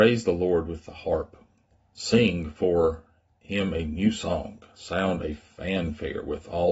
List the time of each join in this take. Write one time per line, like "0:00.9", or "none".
0:01.8

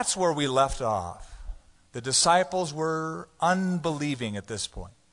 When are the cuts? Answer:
none

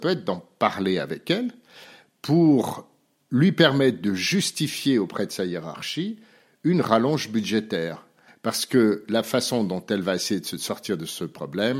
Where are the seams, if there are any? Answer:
0:08.3

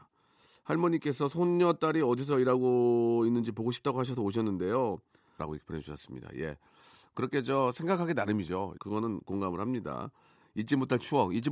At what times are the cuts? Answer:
0:05.4
0:08.8

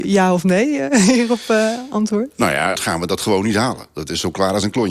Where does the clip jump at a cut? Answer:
0:02.7

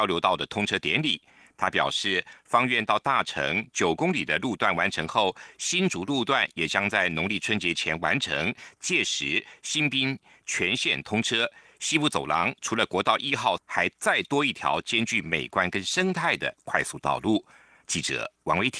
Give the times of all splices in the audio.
0:13.6

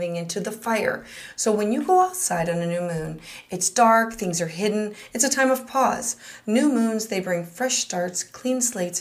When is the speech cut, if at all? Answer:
none

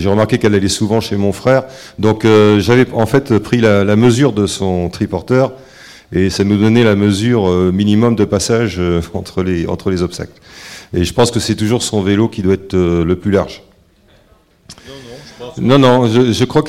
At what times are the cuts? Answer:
none

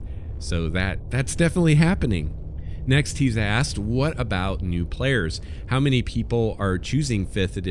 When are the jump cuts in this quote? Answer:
none

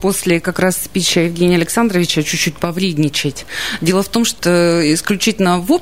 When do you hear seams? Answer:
0:04.4

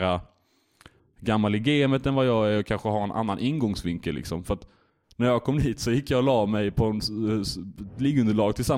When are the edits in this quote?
none

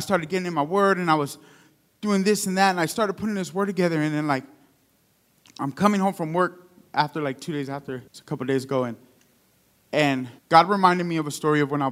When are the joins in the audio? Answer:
0:08.1
0:10.4

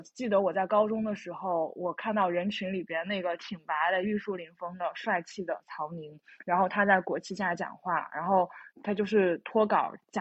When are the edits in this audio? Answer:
0:08.7

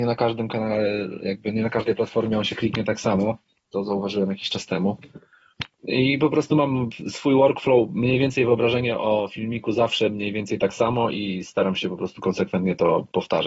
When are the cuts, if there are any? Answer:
0:03.6

